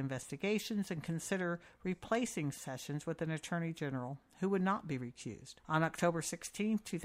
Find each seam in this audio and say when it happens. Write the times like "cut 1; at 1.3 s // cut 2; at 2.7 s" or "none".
cut 1; at 5.6 s